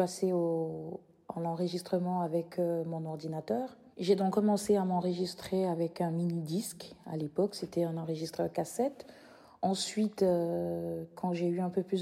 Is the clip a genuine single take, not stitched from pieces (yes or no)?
no